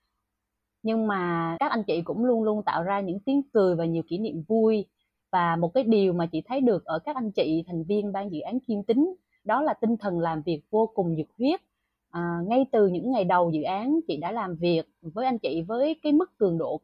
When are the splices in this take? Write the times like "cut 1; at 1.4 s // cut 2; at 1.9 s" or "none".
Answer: cut 1; at 1.6 s